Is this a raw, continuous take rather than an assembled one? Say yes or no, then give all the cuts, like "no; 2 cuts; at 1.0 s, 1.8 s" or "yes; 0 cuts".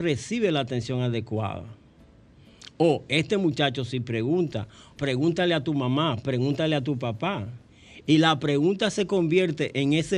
no; 1 cut; at 5.0 s